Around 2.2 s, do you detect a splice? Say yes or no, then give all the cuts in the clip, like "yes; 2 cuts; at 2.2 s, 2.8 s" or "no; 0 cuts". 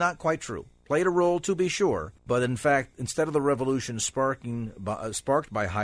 yes; 1 cut; at 2.2 s